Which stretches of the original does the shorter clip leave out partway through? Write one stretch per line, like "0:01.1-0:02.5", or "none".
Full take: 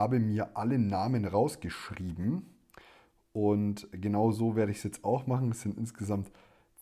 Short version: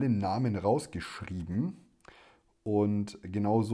none